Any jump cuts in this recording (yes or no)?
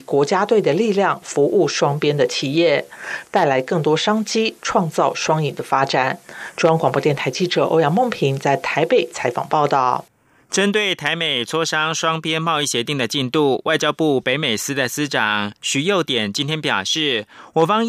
yes